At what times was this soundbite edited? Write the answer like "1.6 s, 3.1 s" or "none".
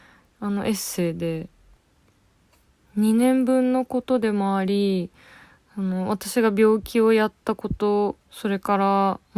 8.2 s